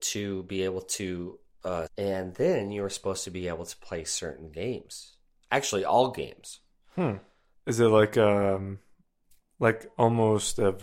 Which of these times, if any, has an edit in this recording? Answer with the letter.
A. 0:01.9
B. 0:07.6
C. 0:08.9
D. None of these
A